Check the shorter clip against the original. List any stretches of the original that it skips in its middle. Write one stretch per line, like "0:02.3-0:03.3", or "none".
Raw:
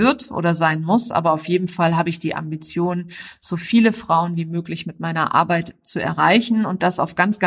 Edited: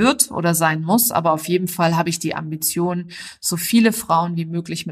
none